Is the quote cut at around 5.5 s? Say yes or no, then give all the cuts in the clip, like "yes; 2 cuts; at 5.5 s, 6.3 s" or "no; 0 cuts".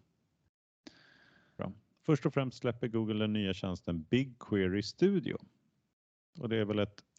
no; 1 cut; at 1.6 s